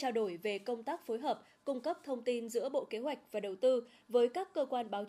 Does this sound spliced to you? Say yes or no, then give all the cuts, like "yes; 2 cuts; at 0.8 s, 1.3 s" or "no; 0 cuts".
no; 0 cuts